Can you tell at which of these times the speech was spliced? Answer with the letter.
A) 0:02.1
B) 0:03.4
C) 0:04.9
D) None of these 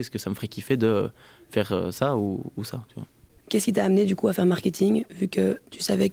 B